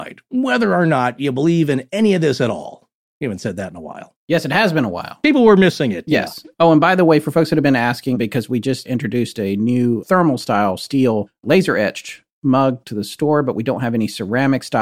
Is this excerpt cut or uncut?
uncut